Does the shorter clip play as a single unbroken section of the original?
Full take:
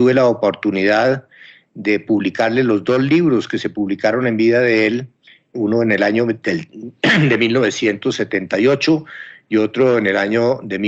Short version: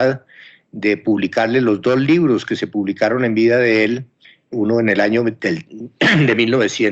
yes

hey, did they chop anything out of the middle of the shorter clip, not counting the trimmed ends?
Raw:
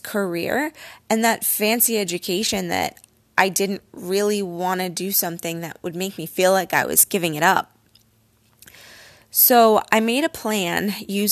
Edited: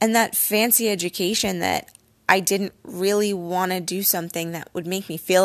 no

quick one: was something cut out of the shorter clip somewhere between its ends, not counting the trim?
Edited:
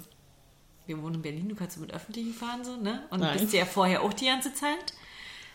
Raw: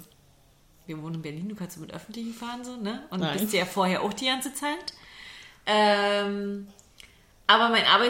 no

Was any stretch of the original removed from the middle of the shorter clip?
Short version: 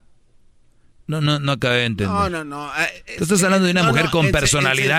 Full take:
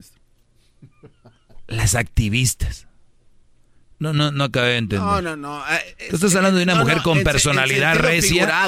no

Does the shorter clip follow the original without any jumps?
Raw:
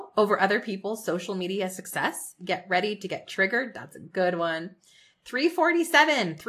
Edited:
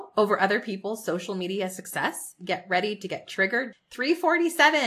no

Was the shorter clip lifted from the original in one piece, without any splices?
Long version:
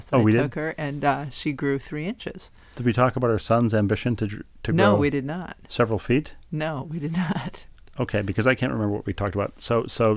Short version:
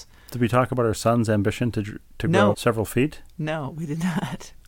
no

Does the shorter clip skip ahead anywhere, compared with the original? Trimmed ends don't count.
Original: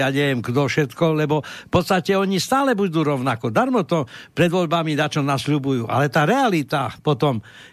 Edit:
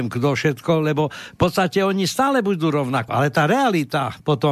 yes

